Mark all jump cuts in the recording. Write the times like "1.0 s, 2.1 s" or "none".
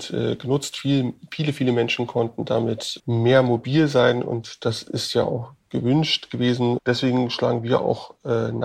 3.0 s, 6.8 s